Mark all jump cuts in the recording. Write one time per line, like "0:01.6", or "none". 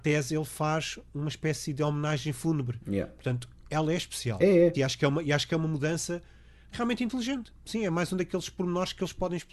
0:04.7